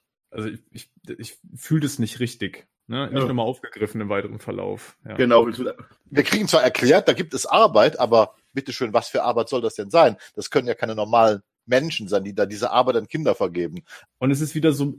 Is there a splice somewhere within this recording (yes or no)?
yes